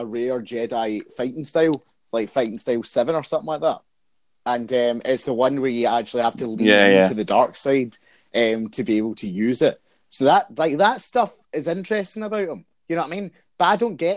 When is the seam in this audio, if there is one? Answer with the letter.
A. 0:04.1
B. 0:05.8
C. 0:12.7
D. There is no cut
D